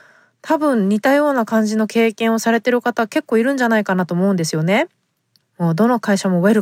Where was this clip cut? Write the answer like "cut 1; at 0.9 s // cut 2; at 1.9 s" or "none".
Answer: cut 1; at 5.4 s